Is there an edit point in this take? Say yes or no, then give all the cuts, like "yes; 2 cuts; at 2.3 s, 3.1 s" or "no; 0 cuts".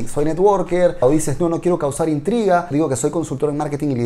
yes; 2 cuts; at 1.0 s, 2.7 s